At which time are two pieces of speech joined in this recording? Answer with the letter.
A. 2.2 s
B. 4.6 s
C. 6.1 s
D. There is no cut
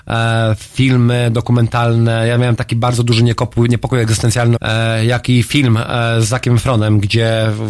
B